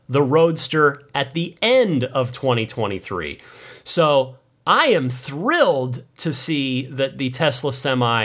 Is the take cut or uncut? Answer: uncut